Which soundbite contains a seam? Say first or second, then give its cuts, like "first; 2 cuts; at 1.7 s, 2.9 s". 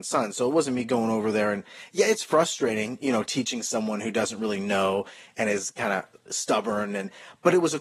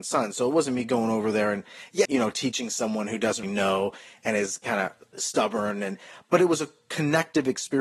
second; 2 cuts; at 2.1 s, 3.4 s